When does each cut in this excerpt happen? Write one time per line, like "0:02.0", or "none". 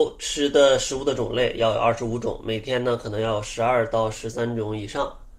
none